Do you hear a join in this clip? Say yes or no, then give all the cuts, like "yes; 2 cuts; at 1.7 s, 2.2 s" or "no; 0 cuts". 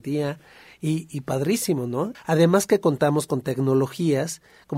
yes; 1 cut; at 2.1 s